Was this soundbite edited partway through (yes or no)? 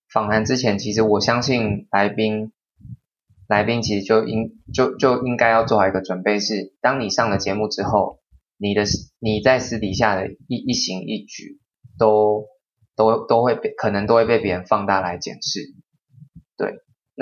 no